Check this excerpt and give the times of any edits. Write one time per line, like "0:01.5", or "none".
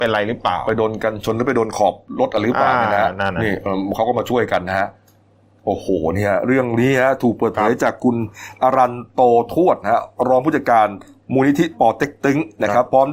none